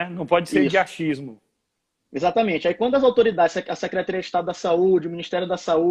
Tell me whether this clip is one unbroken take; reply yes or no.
yes